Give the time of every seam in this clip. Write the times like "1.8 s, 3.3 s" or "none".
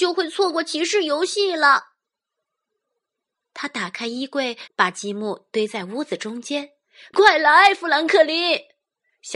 4.7 s, 7.1 s